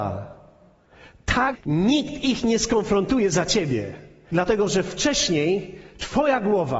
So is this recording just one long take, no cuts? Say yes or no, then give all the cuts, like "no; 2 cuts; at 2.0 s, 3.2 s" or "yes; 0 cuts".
no; 2 cuts; at 1.5 s, 4.3 s